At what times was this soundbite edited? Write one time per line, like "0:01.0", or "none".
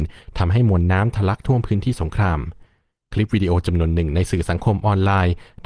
none

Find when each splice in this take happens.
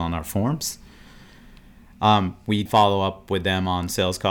0:02.7

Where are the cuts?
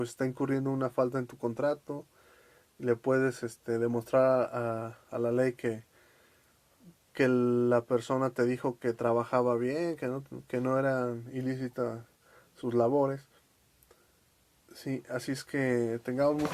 0:14.6

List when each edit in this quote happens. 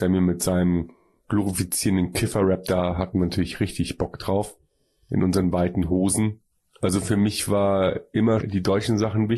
0:06.6
0:08.4

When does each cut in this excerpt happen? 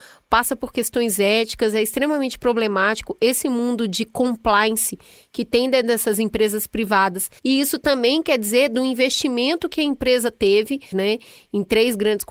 0:07.4
0:10.9

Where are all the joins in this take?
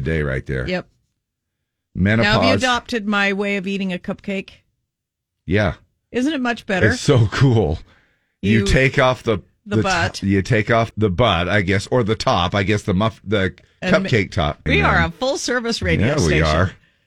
0:10.9
0:14.7

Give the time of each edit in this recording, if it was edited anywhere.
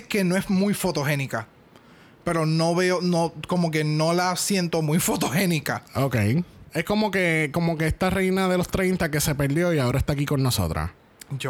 0:06.6

